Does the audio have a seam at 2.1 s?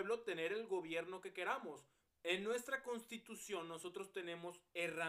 yes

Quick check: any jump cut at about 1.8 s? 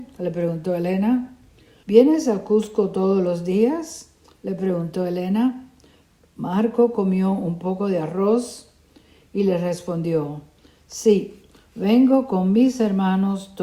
yes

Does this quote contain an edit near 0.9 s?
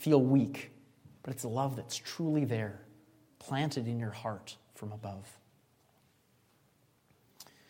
no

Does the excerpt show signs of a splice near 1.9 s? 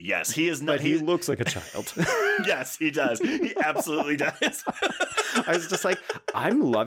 no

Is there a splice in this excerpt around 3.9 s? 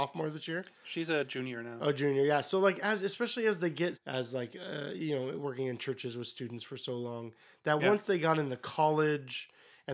yes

